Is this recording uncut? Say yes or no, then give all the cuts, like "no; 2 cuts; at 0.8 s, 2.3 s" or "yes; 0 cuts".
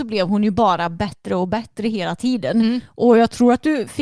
yes; 0 cuts